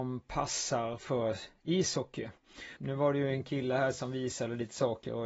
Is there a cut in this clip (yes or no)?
yes